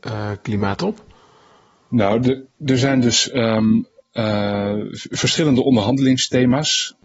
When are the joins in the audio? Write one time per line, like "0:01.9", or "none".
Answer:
none